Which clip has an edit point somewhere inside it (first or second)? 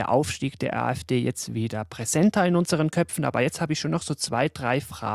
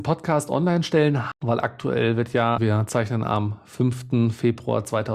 second